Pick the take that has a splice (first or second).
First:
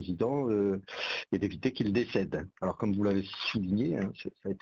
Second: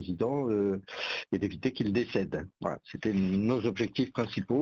first